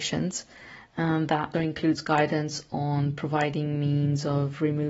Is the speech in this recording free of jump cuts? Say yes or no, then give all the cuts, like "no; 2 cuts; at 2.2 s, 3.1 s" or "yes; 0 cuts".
no; 1 cut; at 1.5 s